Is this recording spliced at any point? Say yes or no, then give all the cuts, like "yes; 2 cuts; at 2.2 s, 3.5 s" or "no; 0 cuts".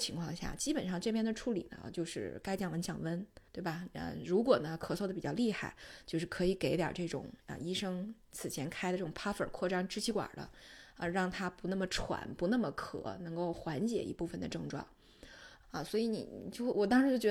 yes; 2 cuts; at 3.5 s, 15.6 s